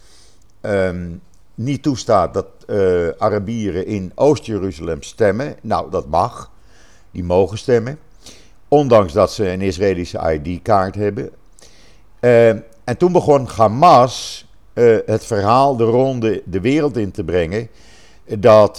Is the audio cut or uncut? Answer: cut